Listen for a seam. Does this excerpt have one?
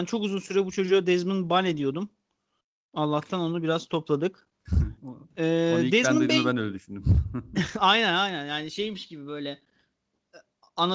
no; 0 cuts

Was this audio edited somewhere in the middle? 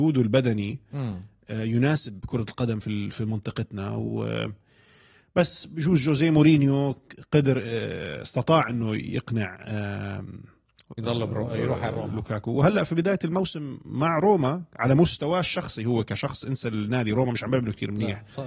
no; 0 cuts

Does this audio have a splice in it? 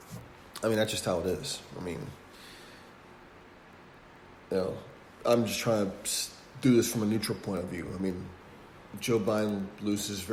no; 0 cuts

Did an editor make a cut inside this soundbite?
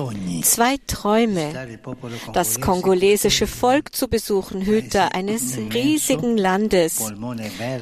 no; 0 cuts

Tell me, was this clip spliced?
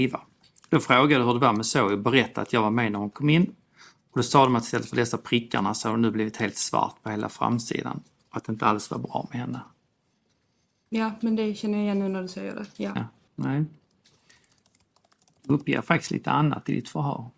yes; 1 cut; at 13.3 s

